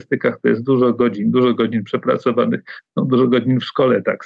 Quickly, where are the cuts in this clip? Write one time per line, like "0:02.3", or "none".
none